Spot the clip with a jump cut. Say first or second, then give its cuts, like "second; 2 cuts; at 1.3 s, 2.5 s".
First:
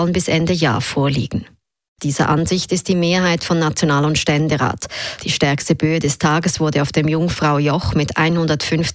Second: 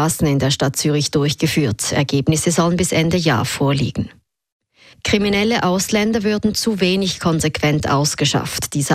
first; 2 cuts; at 2.0 s, 5.2 s